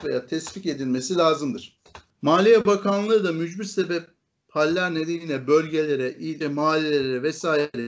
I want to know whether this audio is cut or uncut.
cut